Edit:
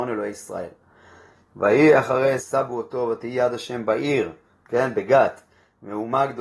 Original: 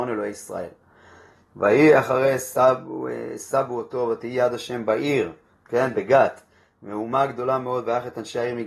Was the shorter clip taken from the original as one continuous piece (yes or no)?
no